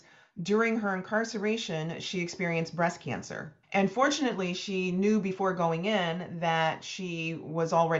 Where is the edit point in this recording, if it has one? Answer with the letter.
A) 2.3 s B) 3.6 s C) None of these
B